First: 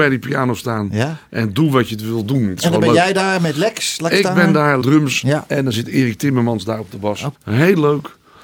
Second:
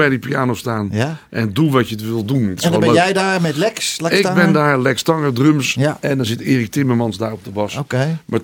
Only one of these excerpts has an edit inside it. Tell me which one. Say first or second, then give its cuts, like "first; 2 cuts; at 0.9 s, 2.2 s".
first; 2 cuts; at 4.8 s, 7.4 s